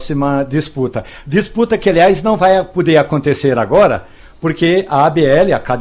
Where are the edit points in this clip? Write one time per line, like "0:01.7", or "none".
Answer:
none